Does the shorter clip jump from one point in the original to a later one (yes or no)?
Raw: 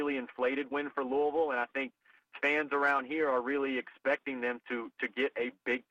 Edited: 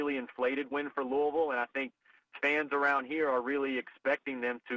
no